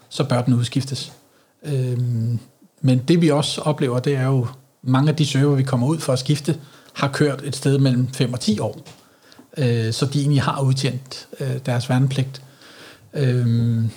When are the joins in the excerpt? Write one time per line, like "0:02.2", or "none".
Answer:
none